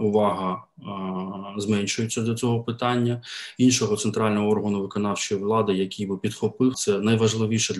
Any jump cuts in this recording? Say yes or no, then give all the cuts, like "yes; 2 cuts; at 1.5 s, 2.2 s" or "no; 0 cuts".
yes; 1 cut; at 6.7 s